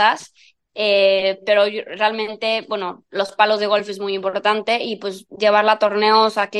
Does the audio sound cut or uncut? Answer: uncut